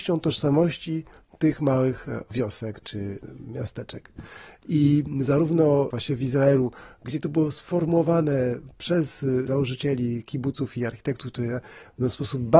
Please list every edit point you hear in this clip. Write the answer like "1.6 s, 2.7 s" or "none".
none